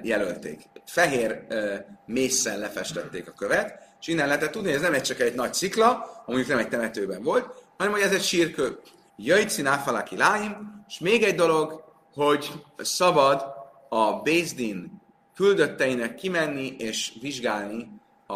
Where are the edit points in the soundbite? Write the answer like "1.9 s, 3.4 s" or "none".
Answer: 9.1 s

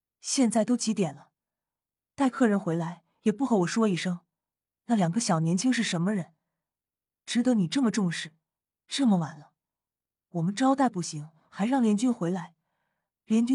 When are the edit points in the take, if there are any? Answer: none

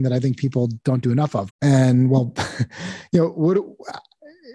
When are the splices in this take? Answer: 1.5 s

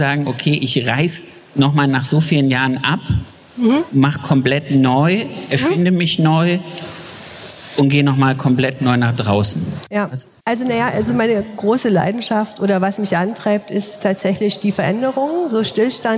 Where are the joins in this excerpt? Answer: 10.4 s

